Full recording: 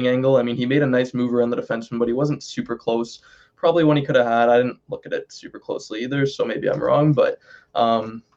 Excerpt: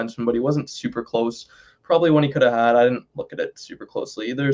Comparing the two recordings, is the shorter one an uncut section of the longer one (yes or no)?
yes